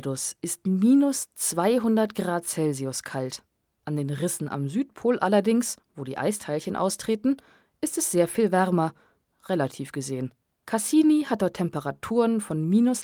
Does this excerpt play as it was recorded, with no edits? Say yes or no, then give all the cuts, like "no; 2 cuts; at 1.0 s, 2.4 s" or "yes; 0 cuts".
yes; 0 cuts